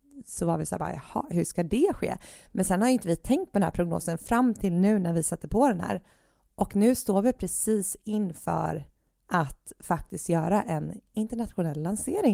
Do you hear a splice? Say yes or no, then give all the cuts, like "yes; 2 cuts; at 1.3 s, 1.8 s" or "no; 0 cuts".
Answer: no; 0 cuts